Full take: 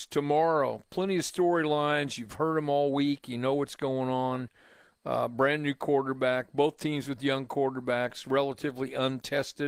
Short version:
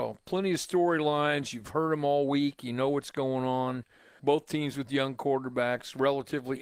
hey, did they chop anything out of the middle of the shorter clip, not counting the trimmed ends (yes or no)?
yes